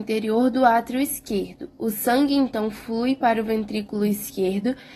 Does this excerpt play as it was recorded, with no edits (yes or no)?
yes